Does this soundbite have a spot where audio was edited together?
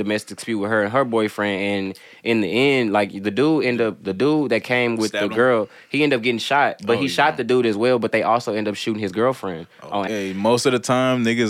yes; 1 cut; at 10.1 s

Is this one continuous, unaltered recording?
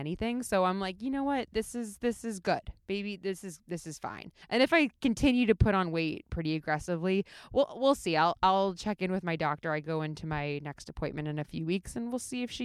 no; 1 cut; at 4.4 s

